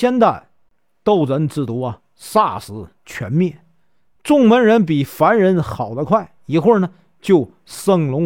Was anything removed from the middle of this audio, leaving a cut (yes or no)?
no